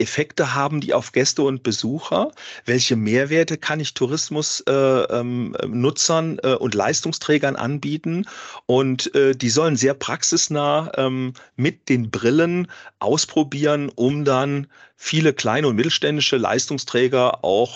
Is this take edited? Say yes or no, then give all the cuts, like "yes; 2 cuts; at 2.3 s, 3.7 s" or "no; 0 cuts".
no; 0 cuts